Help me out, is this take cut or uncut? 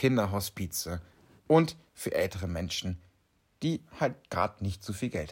uncut